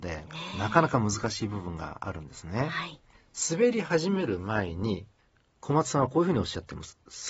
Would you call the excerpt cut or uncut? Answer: uncut